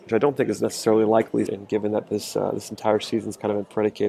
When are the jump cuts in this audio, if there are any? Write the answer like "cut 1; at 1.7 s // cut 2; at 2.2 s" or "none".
cut 1; at 1.5 s